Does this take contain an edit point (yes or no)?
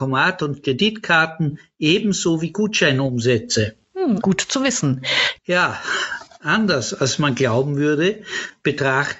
yes